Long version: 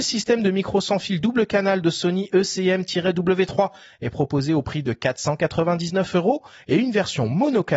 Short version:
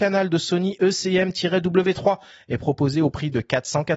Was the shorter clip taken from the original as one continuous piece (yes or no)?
yes